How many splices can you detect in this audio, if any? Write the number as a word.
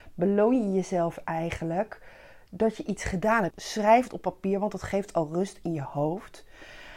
one